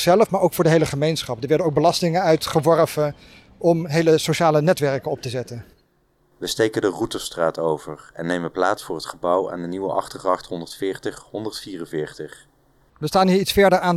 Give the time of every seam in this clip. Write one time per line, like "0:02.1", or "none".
0:12.9